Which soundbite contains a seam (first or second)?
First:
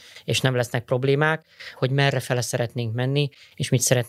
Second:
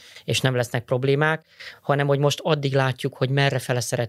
first